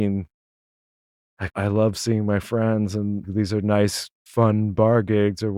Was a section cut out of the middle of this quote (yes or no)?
yes